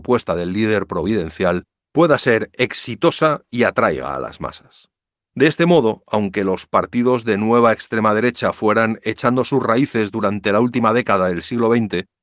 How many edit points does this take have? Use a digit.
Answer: 0